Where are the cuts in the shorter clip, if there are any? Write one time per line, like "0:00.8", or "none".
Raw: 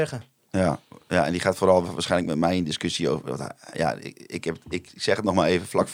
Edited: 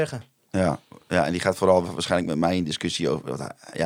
none